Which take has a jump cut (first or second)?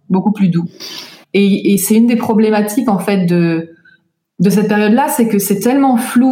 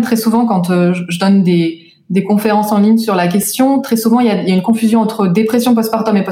first